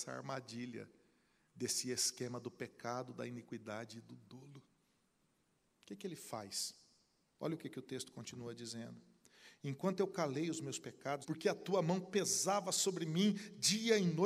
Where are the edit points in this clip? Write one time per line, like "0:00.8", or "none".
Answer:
0:07.4
0:11.2